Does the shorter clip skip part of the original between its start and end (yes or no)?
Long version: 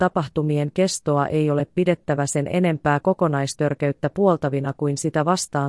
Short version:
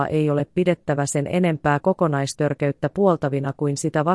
no